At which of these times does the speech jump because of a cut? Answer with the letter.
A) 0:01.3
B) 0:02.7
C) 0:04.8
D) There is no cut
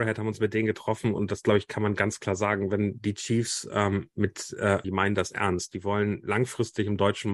C